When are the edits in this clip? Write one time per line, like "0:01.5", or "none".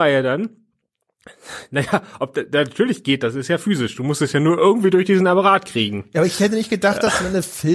none